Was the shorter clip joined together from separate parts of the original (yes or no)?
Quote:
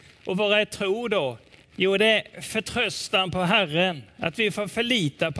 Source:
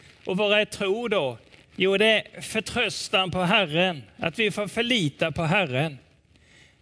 no